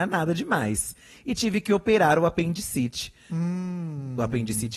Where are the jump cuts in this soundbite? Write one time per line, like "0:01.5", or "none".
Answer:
none